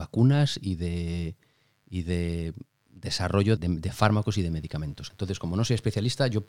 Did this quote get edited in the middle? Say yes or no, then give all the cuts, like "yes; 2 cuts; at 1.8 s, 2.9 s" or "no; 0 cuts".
yes; 2 cuts; at 3.6 s, 5.1 s